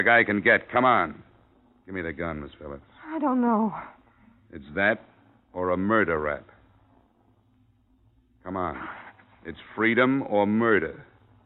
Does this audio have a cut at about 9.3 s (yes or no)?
yes